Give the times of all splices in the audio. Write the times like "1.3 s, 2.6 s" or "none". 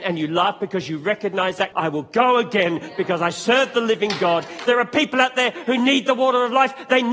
1.7 s, 4.7 s